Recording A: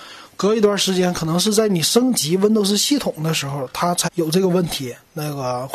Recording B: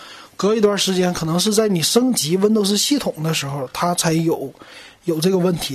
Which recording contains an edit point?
A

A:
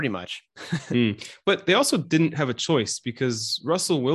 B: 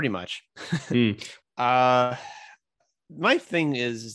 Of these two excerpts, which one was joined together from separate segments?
B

